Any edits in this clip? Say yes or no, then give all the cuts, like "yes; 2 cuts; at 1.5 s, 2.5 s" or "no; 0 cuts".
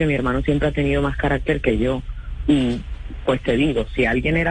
yes; 1 cut; at 2.4 s